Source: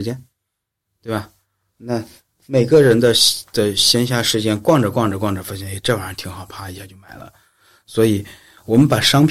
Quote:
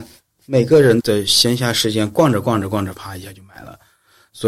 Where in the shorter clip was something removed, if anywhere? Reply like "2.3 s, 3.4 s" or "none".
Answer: 1.0 s, 2.9 s